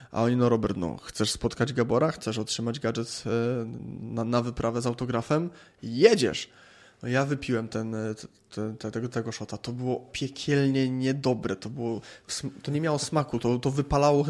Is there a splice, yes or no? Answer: no